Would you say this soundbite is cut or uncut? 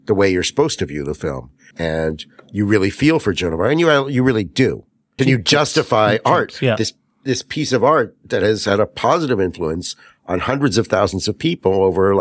cut